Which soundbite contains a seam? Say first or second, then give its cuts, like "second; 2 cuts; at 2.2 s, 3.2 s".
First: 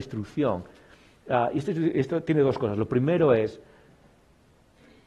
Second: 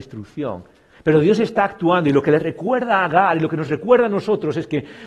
second; 1 cut; at 0.9 s